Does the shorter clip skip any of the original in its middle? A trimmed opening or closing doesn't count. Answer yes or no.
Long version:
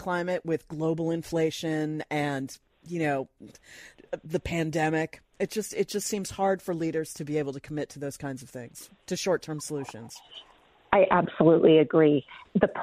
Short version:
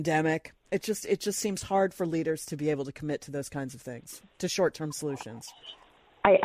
no